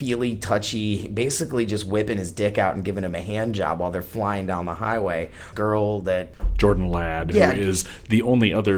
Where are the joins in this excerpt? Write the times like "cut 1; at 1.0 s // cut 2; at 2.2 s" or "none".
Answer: cut 1; at 5.5 s